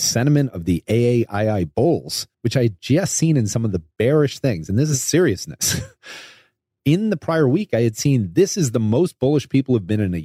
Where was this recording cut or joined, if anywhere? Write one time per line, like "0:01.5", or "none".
0:02.3